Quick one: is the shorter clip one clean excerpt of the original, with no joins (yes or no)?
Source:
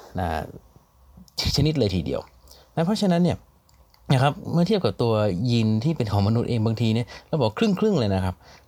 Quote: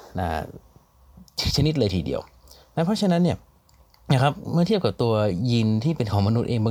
yes